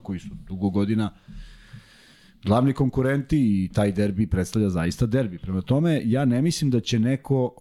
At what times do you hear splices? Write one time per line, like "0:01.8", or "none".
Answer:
none

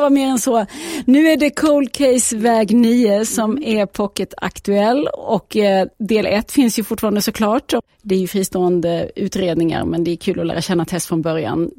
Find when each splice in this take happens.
none

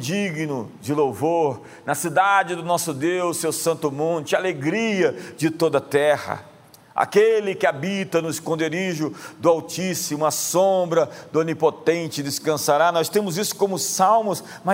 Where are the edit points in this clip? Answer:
none

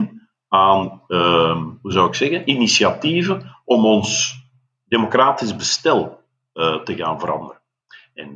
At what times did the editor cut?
none

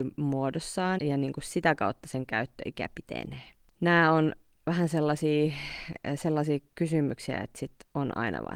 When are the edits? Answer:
0:01.0

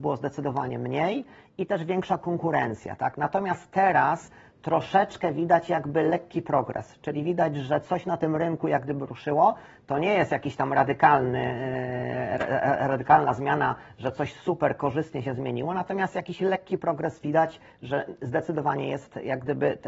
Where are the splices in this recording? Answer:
none

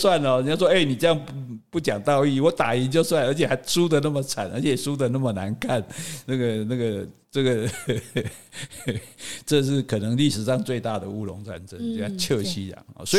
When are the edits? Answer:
none

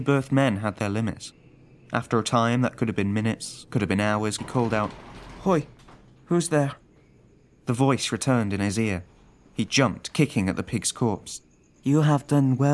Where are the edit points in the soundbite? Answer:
0:04.4

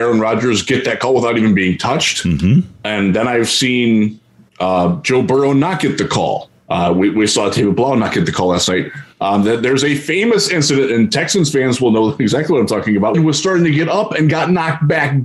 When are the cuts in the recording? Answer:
0:13.1

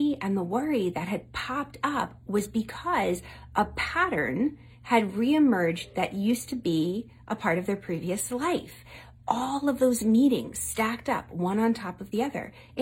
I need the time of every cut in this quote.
none

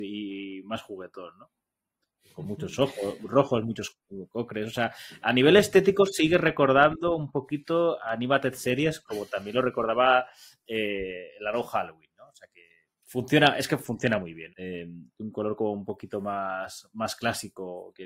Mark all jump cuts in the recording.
0:12.9
0:14.5

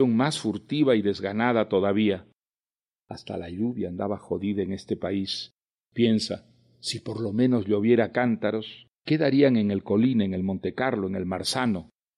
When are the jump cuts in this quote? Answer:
0:08.9

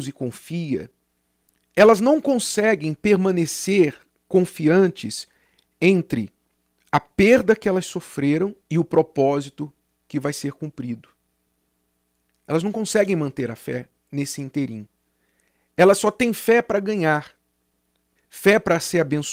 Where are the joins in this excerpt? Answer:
0:08.6
0:18.2

